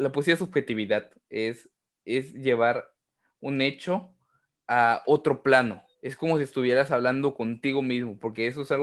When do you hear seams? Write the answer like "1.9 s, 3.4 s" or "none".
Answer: 5.9 s